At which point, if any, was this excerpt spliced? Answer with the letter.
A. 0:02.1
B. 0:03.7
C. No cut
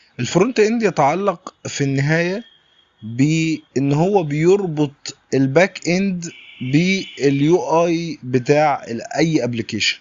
B